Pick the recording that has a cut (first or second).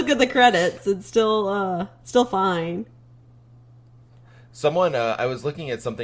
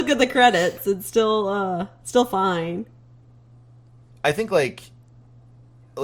second